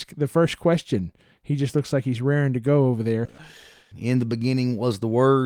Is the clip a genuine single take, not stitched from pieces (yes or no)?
no